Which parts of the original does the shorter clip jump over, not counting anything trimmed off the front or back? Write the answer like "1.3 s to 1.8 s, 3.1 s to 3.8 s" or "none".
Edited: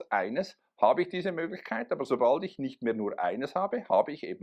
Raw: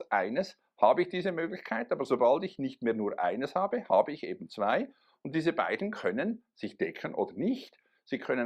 none